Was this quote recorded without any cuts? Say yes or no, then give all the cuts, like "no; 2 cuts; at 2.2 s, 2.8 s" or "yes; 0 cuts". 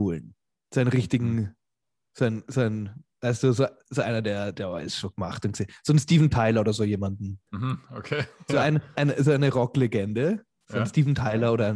no; 2 cuts; at 7.5 s, 8.9 s